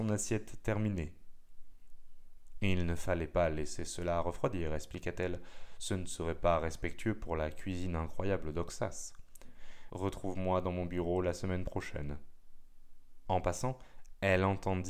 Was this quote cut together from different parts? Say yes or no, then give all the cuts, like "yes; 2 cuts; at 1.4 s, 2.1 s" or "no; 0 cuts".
yes; 2 cuts; at 9.9 s, 13.3 s